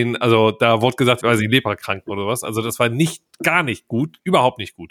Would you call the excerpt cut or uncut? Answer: cut